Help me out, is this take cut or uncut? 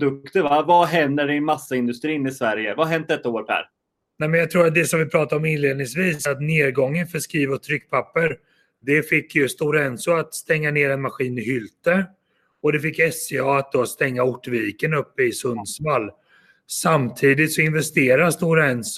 uncut